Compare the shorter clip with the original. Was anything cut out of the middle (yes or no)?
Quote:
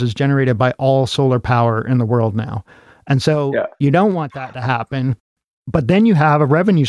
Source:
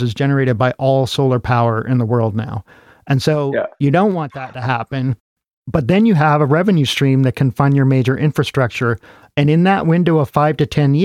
no